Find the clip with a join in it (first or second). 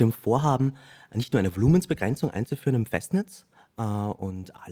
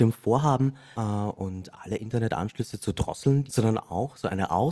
second